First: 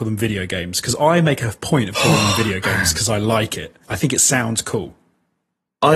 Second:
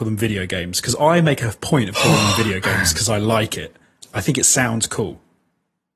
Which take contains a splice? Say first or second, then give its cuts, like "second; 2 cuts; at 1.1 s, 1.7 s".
first; 1 cut; at 3.8 s